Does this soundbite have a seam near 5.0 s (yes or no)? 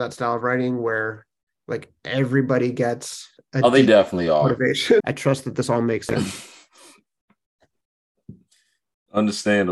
yes